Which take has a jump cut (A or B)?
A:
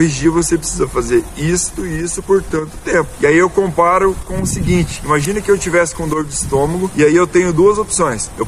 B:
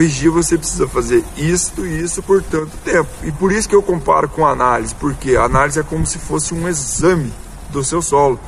A